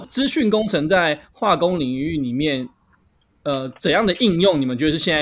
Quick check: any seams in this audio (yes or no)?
no